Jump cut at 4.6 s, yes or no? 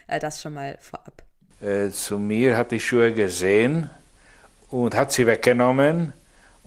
no